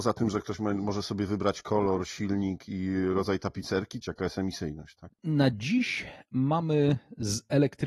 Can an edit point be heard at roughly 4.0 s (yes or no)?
yes